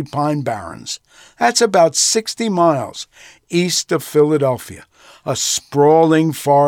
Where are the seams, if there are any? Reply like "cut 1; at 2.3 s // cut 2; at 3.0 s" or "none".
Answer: none